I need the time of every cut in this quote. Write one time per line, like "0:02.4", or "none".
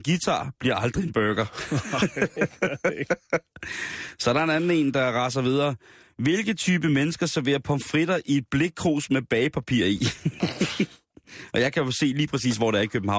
none